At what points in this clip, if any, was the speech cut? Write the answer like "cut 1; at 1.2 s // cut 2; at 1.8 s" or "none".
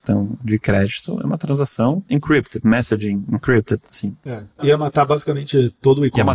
none